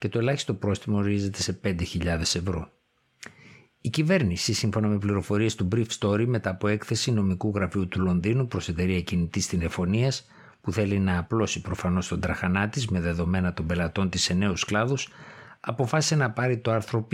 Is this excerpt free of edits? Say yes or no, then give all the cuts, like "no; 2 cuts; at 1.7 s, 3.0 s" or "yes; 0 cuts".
yes; 0 cuts